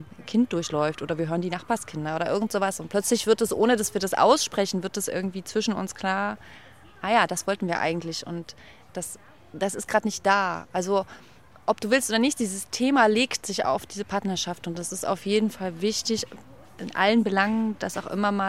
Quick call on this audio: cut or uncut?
uncut